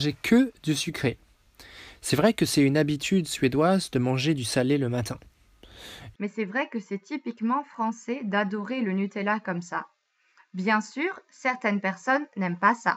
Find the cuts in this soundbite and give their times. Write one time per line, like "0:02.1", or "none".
0:06.1